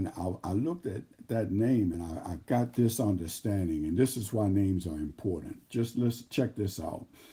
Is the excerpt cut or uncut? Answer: uncut